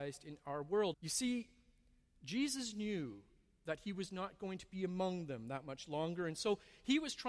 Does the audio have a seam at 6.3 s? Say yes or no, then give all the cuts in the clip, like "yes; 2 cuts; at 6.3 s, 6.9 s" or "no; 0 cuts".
no; 1 cut; at 0.9 s